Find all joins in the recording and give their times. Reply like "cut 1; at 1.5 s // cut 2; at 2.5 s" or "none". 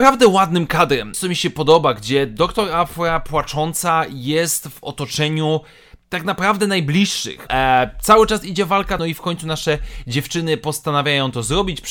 cut 1; at 1.1 s // cut 2; at 7.5 s // cut 3; at 9.0 s